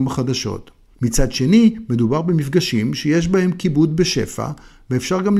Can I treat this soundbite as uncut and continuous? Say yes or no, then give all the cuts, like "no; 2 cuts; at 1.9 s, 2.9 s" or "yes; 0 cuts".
no; 1 cut; at 0.9 s